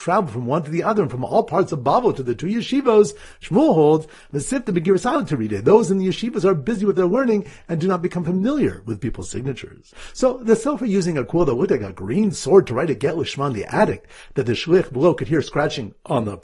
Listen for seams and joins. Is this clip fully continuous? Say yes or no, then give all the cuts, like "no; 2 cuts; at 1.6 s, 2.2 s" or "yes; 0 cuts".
no; 1 cut; at 3.4 s